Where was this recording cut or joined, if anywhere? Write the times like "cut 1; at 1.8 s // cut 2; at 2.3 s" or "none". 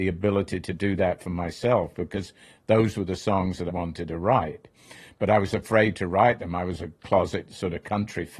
cut 1; at 3.7 s

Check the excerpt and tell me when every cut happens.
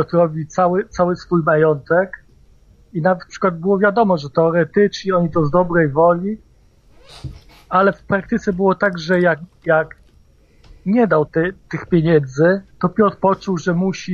cut 1; at 11.3 s // cut 2; at 12.7 s

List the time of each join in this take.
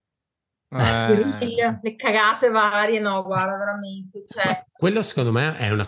cut 1; at 4.7 s

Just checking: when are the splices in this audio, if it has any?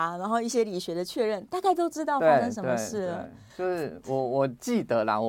none

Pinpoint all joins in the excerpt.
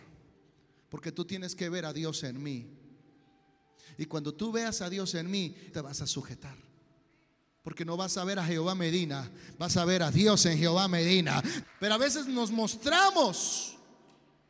cut 1; at 5.7 s // cut 2; at 11.6 s

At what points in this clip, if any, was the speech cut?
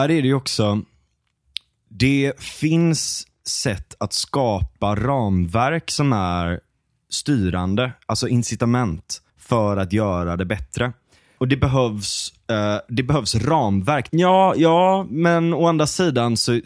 cut 1; at 9.3 s // cut 2; at 11.4 s // cut 3; at 14.1 s

